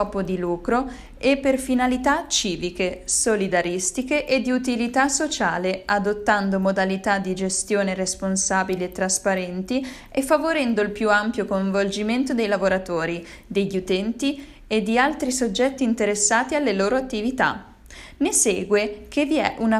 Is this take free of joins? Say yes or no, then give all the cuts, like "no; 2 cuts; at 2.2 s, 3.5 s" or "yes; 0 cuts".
yes; 0 cuts